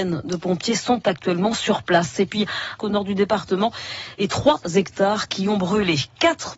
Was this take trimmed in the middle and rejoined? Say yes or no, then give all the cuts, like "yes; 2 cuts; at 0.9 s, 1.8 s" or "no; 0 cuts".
yes; 1 cut; at 2.8 s